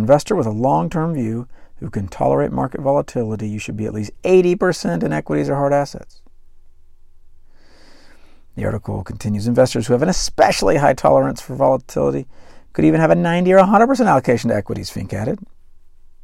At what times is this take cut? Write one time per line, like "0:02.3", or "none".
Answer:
none